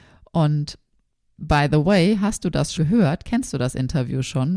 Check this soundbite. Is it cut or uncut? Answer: cut